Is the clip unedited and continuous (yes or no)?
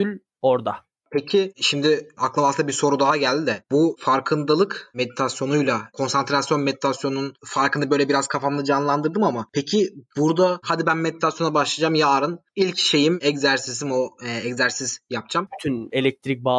no